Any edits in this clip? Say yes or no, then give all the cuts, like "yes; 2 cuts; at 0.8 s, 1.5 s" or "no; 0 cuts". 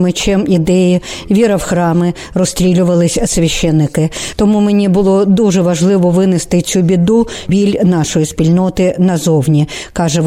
no; 0 cuts